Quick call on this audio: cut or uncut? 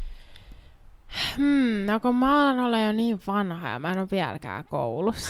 uncut